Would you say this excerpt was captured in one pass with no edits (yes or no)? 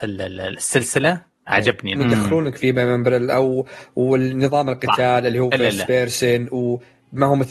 no